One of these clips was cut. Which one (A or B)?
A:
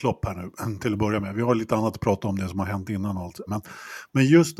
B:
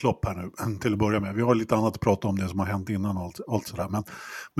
A